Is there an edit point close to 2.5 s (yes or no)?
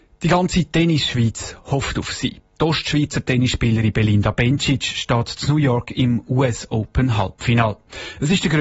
no